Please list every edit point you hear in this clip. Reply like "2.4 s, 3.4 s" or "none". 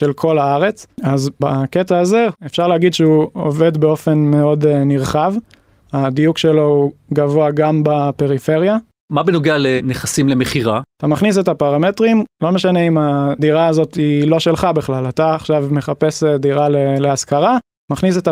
10.9 s

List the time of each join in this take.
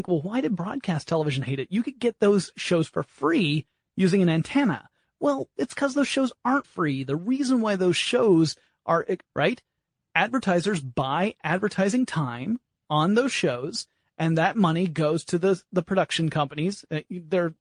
6.6 s, 9.3 s

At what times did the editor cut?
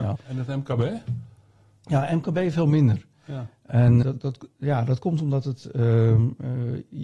4.0 s

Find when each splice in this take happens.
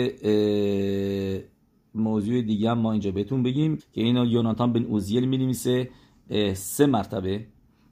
3.8 s

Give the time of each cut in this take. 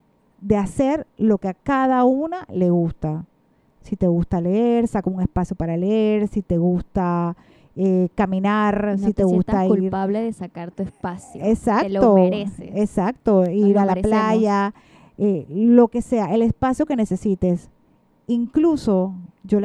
none

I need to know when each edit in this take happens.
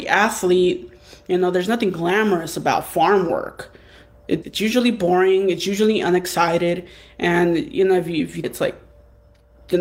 4.4 s, 8.4 s

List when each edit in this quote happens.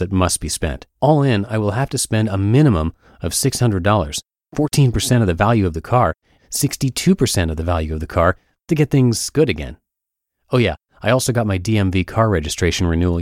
0.9 s, 6.4 s

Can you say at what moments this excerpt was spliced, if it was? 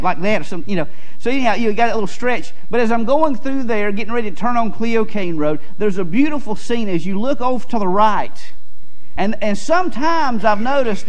9.2 s

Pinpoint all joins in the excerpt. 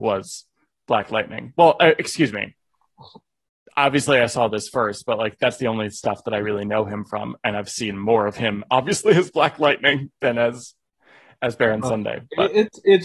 none

